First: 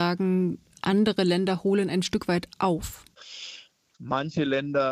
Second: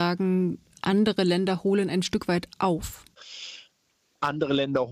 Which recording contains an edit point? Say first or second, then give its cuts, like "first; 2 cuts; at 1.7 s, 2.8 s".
first; 1 cut; at 3.9 s